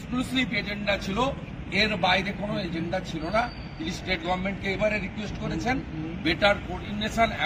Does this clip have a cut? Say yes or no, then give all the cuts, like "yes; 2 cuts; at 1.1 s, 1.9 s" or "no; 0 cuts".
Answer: yes; 1 cut; at 4.8 s